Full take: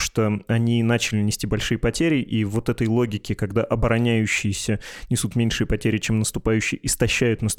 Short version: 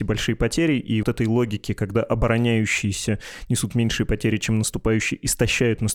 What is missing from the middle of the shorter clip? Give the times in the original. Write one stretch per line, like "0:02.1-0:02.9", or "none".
0:02.5-0:02.6